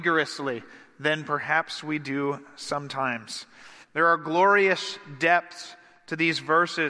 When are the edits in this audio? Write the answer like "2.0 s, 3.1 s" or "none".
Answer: 3.8 s